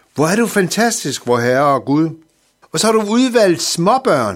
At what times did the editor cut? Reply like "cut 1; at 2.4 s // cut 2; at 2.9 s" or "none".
cut 1; at 2.6 s